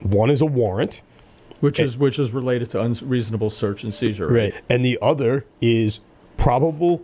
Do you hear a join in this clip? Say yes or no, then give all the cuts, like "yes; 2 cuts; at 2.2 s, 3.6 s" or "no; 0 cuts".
yes; 1 cut; at 4.5 s